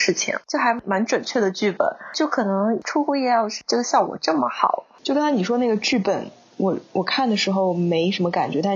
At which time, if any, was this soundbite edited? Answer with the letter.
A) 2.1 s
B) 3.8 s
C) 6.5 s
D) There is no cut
D